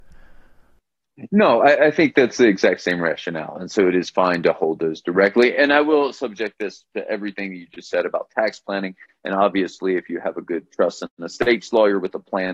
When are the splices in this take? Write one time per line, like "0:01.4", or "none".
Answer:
none